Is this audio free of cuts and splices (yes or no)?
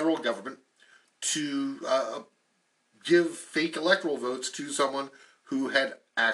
yes